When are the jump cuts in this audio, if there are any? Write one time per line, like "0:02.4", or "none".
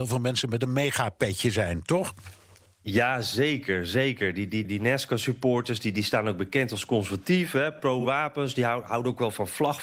0:04.6